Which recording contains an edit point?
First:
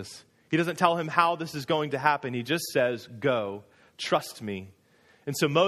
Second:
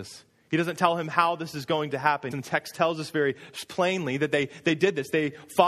second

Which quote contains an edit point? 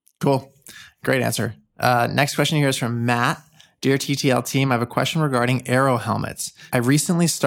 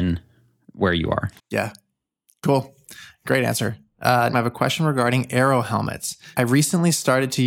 second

